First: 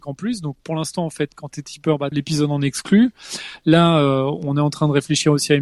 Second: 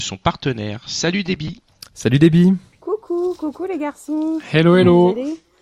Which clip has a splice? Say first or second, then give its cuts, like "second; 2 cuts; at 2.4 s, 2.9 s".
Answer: first; 1 cut; at 2.1 s